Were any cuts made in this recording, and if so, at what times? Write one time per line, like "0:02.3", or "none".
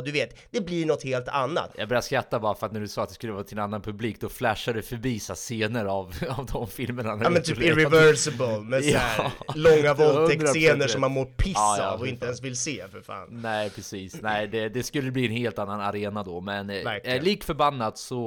0:01.7